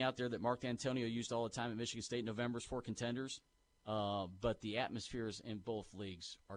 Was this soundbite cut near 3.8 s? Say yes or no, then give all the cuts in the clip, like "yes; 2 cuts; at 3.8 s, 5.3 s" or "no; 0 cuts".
yes; 1 cut; at 3.8 s